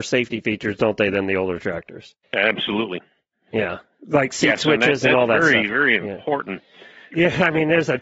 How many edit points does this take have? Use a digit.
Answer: 2